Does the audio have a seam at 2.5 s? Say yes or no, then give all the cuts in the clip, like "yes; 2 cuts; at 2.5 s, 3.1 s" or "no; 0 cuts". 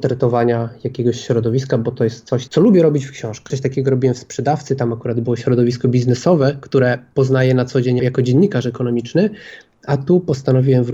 yes; 2 cuts; at 2.5 s, 8.0 s